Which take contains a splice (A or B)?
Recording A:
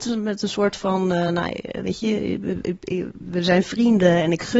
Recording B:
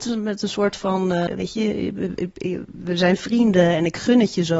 B